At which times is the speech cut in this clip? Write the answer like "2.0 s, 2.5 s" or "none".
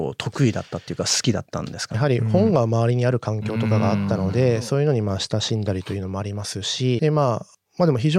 1.9 s, 7.0 s